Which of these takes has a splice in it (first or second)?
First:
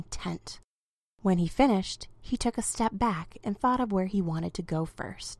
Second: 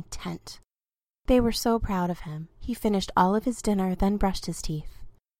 second